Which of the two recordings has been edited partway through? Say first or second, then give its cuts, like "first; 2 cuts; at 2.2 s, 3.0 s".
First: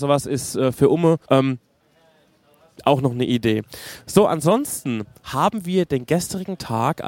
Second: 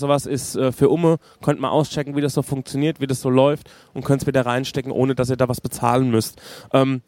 first; 1 cut; at 1.3 s